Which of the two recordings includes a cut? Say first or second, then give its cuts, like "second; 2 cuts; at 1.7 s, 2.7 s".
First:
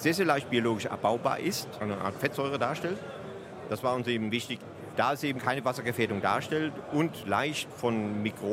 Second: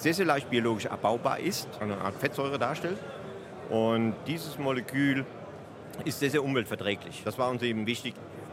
first; 2 cuts; at 3.7 s, 5.4 s